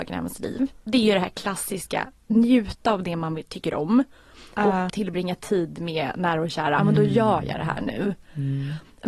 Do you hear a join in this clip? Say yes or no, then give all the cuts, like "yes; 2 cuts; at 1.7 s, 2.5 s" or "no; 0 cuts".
yes; 2 cuts; at 4.9 s, 6.8 s